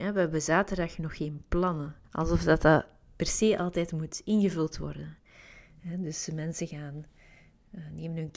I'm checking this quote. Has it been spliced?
yes; 1 cut; at 2.0 s

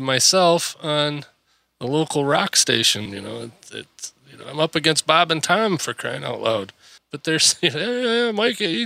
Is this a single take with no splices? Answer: no; 2 cuts; at 3.1 s, 7.0 s

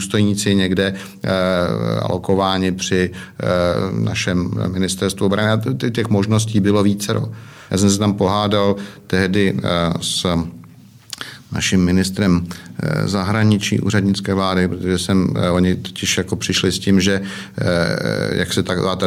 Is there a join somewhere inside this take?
yes; 1 cut; at 7.7 s

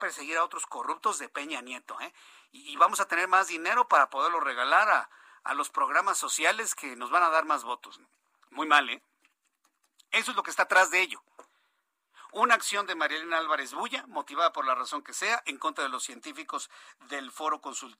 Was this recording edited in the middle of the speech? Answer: no; 0 cuts

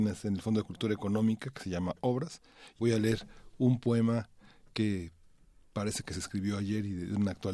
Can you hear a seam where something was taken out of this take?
yes; 1 cut; at 2.8 s

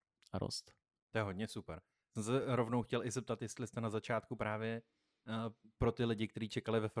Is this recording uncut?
yes; 0 cuts

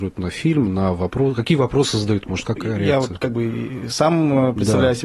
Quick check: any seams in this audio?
yes; 1 cut; at 2.6 s

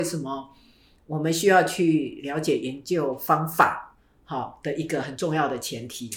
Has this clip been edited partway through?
no; 0 cuts

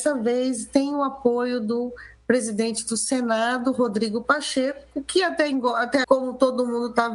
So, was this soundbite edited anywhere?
yes; 1 cut; at 6.0 s

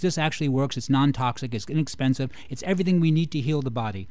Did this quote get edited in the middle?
no; 0 cuts

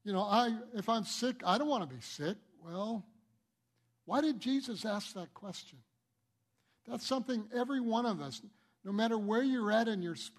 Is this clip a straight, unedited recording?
yes; 0 cuts

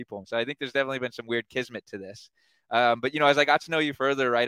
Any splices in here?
no; 0 cuts

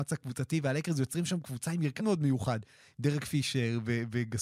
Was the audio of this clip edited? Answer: yes; 1 cut; at 2.0 s

